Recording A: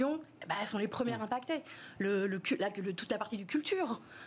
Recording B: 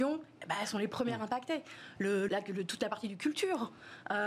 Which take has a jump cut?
B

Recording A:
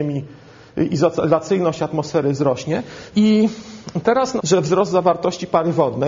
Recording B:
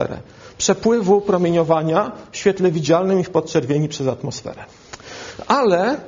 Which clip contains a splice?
A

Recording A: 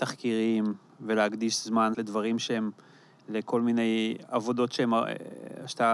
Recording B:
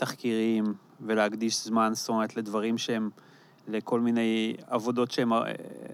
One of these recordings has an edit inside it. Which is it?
A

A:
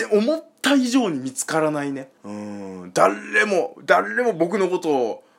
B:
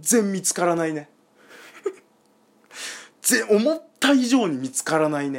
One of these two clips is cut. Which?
A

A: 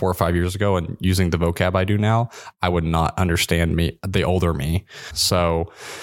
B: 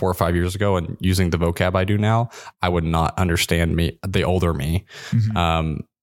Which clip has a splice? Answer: A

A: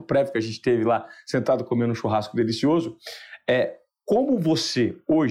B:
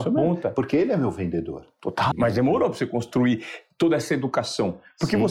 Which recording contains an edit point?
B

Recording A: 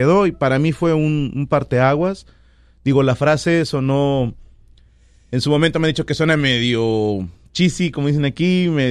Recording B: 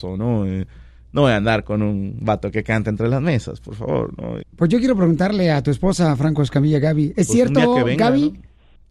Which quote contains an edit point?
B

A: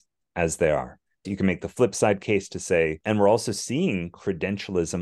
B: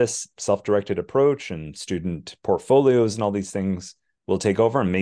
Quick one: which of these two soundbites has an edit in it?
A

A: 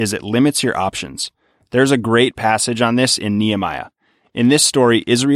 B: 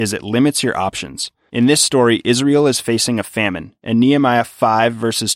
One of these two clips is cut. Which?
B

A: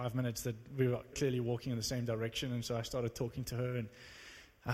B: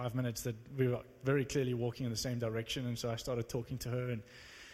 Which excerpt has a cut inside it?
A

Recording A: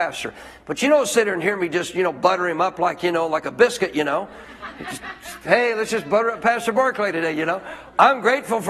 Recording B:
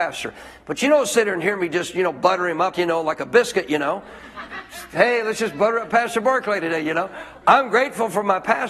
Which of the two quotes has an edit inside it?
B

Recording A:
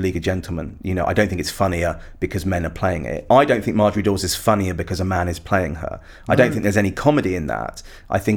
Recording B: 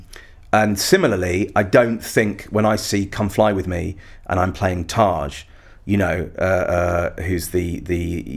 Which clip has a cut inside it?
A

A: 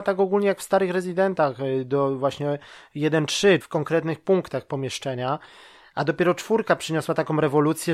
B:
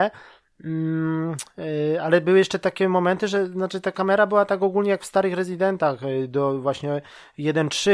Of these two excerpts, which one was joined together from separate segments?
A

